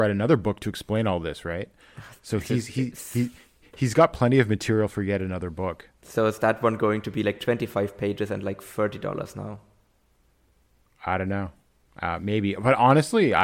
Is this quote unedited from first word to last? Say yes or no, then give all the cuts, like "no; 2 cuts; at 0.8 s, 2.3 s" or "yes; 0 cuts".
yes; 0 cuts